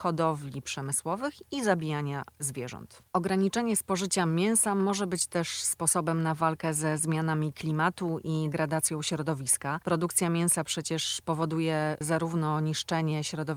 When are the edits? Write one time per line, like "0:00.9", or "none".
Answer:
0:08.5